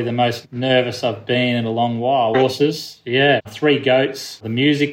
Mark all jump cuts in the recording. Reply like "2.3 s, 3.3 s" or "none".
2.3 s, 3.4 s

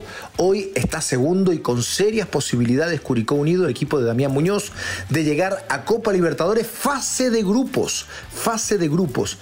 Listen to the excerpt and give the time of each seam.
none

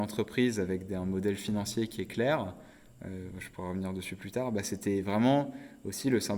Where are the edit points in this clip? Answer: none

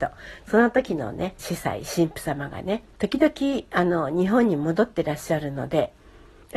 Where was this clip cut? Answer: 1.4 s, 2.9 s

